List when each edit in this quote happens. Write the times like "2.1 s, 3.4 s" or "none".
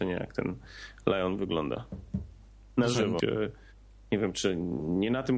3.2 s